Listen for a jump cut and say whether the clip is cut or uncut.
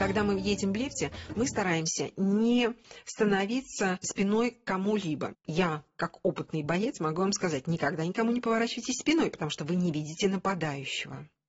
cut